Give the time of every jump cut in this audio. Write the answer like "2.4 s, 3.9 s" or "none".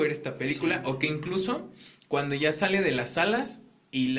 none